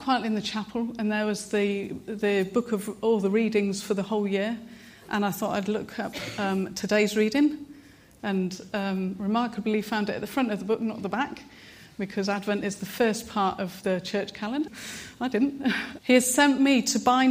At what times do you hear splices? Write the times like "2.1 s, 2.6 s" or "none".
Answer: 14.7 s, 16.0 s